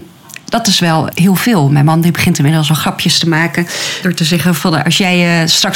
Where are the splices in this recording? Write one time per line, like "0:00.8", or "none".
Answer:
0:01.1